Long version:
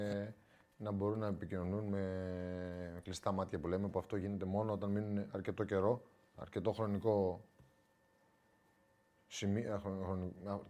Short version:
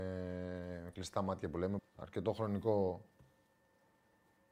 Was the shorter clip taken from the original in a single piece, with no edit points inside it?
no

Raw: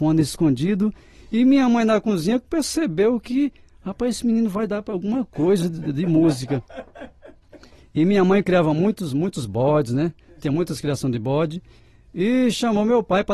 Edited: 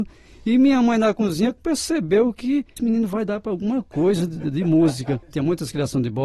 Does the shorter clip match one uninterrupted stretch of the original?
no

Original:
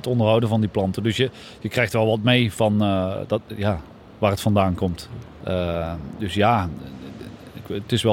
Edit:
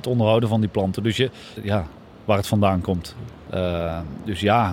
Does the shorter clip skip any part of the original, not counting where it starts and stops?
yes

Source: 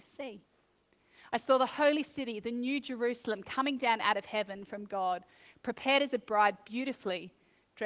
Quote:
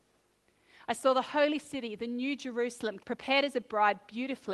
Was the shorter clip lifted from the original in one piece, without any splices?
no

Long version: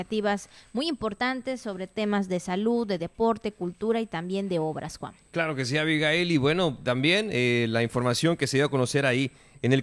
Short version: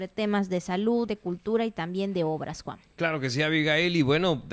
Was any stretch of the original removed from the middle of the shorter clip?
yes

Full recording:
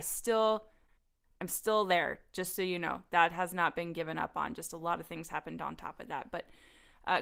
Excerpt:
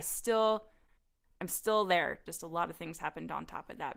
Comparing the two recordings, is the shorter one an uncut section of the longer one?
no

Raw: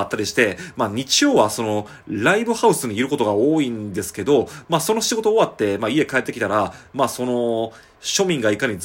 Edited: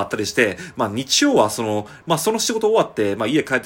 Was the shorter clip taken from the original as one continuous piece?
no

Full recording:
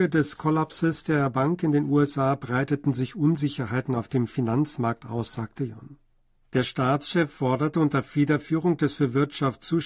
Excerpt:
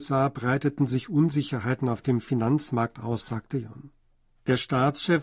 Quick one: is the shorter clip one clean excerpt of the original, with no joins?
yes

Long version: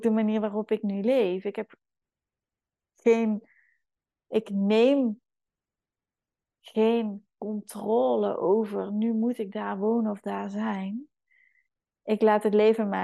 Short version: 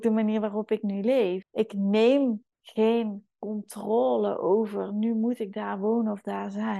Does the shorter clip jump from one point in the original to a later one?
yes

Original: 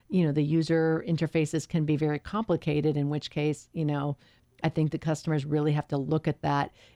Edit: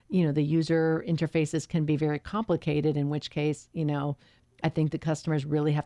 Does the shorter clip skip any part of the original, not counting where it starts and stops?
no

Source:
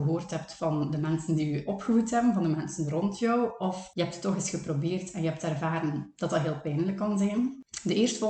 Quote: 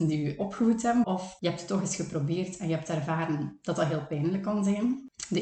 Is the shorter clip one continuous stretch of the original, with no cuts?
no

